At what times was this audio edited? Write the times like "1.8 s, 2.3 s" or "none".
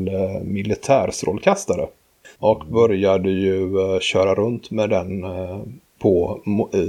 2.4 s